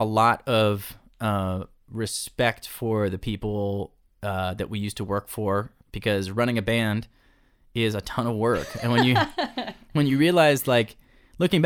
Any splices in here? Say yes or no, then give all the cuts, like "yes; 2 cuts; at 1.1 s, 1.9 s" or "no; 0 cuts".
no; 0 cuts